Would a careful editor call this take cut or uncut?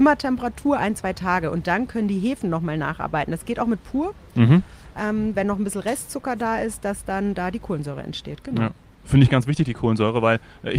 uncut